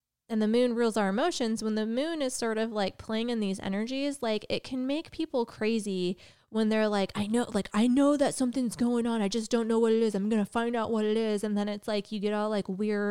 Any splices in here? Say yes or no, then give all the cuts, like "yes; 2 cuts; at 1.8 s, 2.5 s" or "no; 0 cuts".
no; 0 cuts